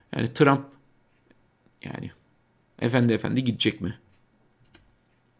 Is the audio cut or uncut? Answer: uncut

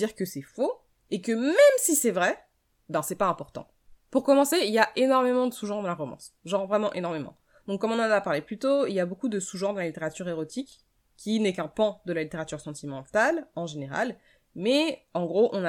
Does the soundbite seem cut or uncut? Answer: uncut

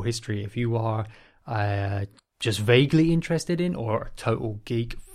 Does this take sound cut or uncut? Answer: uncut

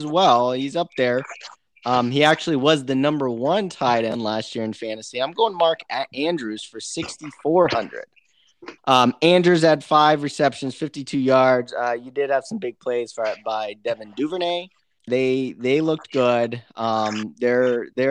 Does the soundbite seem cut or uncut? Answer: cut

